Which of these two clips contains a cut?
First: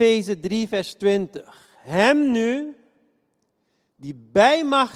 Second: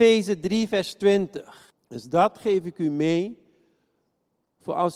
second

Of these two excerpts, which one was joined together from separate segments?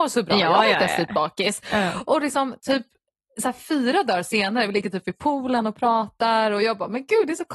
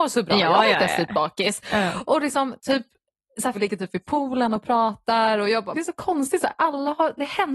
second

